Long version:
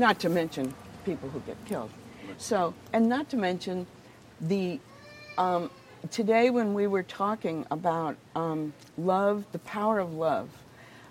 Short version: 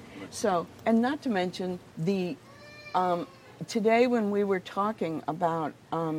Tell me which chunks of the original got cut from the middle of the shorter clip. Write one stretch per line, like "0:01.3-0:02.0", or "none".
0:04.0-0:04.3